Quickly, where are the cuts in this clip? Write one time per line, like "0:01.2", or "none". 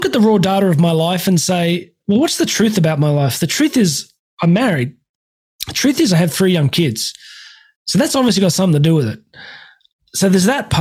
none